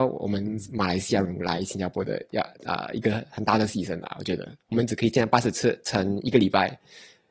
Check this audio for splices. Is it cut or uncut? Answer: cut